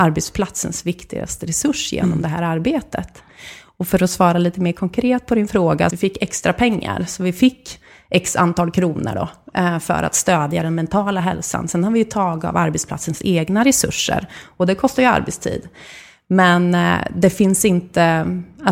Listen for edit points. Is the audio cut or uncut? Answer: cut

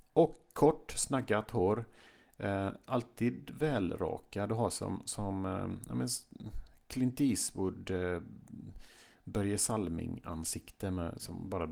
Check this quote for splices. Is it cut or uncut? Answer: uncut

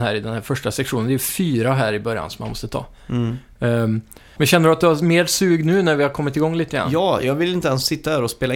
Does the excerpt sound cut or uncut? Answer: cut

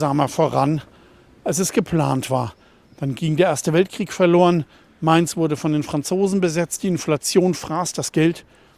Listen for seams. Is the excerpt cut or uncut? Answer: uncut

